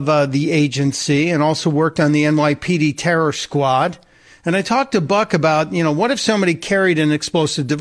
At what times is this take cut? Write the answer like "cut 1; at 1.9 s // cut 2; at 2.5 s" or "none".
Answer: none